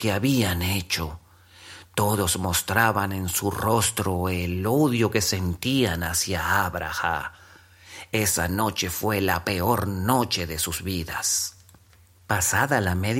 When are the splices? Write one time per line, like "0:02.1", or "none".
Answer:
none